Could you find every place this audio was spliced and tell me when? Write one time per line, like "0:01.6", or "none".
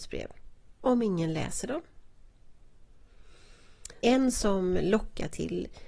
0:04.0